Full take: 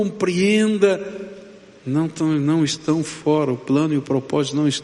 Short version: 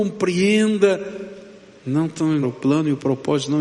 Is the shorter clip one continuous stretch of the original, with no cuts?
no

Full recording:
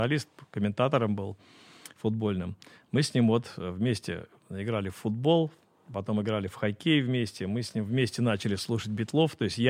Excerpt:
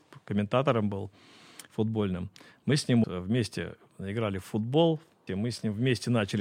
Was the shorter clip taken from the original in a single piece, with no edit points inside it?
no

